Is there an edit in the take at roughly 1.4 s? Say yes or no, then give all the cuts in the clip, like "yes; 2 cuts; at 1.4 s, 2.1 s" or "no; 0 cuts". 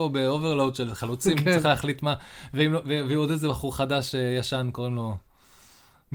no; 0 cuts